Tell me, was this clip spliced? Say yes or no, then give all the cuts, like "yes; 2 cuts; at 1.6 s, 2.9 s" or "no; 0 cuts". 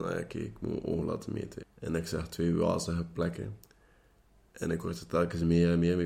yes; 1 cut; at 1.6 s